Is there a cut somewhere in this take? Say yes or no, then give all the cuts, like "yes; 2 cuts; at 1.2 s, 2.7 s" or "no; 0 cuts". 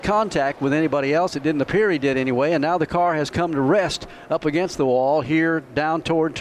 no; 0 cuts